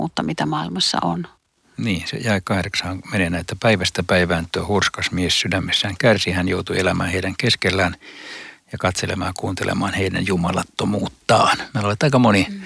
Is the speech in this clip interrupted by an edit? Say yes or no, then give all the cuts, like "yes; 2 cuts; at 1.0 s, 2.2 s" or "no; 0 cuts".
no; 0 cuts